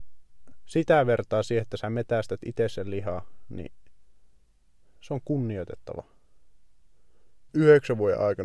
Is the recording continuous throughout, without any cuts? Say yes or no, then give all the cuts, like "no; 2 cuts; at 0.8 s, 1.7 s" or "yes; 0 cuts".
no; 1 cut; at 7.5 s